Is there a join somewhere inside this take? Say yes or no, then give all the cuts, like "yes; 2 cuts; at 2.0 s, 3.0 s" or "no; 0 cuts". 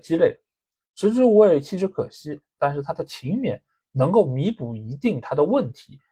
yes; 1 cut; at 2.6 s